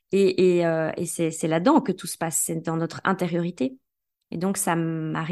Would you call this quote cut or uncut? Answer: uncut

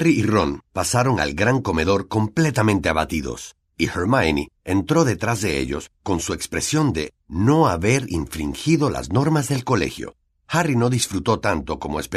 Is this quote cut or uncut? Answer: uncut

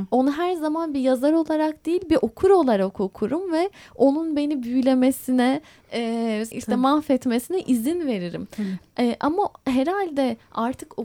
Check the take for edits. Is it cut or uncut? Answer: cut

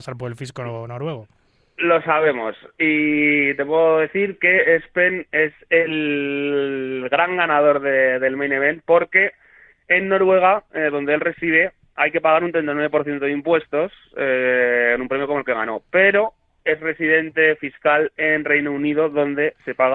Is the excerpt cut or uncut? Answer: uncut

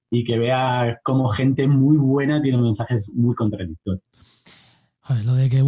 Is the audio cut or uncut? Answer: uncut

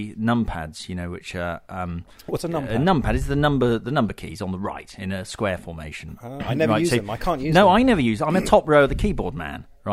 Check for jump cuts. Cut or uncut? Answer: uncut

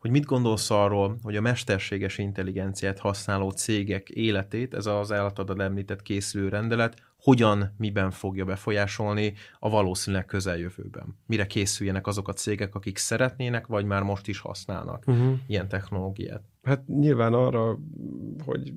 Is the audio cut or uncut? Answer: uncut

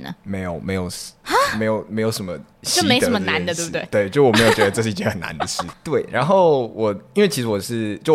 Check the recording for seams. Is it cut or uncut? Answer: cut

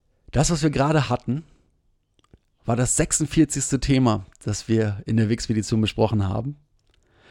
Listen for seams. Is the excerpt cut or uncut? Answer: uncut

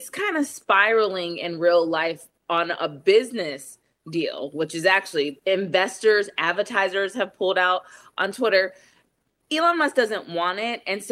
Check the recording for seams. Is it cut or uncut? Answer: uncut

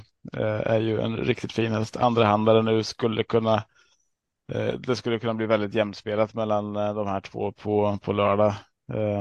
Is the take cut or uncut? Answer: uncut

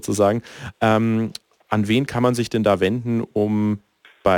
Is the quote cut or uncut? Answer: uncut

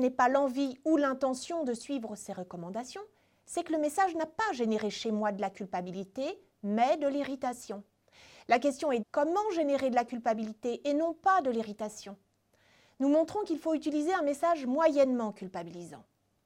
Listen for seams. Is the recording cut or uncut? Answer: cut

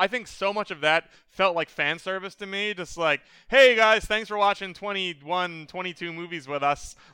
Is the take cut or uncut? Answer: uncut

